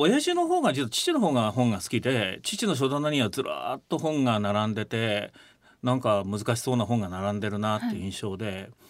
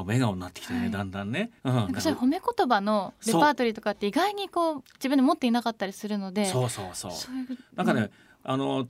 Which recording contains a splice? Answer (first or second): second